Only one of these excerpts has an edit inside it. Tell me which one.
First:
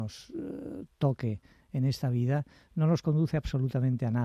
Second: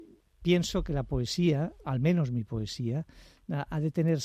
second; 1 cut; at 1.8 s

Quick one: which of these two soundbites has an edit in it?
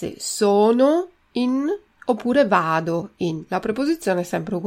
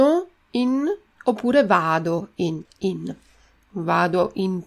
second; 1 cut; at 2.6 s

